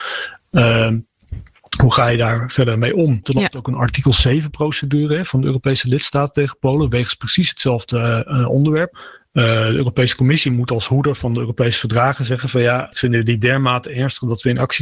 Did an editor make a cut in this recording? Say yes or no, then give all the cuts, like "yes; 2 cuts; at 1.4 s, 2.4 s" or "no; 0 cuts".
yes; 3 cuts; at 3.2 s, 8.9 s, 12.9 s